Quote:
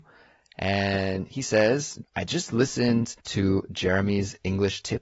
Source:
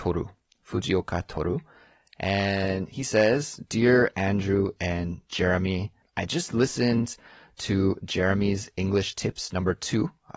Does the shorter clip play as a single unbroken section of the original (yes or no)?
no